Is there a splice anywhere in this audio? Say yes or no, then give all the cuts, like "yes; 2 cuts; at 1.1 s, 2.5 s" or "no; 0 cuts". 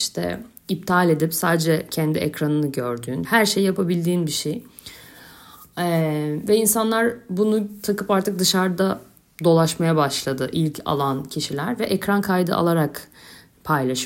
yes; 1 cut; at 3.2 s